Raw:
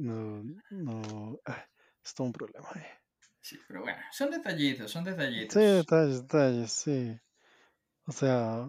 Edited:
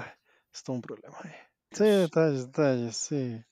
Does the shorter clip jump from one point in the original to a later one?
yes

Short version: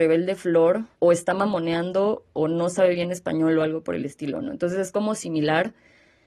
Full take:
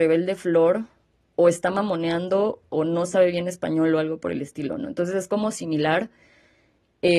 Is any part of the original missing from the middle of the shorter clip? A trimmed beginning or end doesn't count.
yes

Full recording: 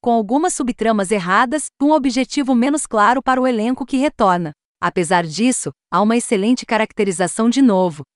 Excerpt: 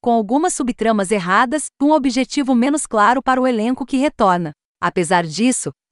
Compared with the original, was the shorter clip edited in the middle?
no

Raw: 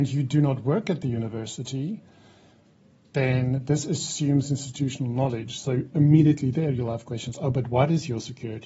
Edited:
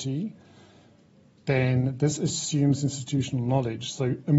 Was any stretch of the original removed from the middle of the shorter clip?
no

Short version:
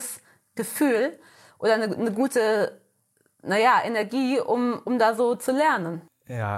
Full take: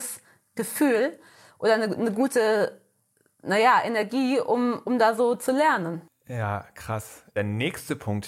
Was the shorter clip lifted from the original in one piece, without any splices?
yes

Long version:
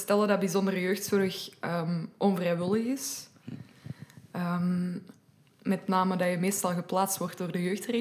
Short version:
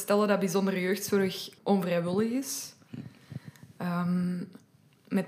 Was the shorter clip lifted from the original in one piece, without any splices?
no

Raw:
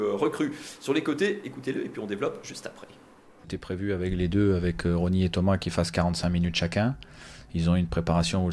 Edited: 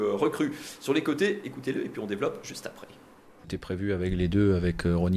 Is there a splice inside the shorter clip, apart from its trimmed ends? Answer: no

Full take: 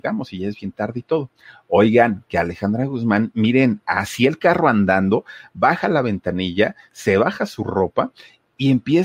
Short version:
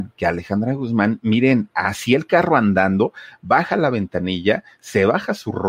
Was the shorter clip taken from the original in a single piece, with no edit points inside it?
yes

